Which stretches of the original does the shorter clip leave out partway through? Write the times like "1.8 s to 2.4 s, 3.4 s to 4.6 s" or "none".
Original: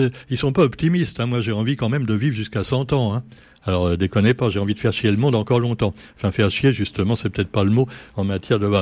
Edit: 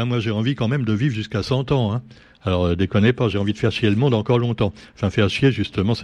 none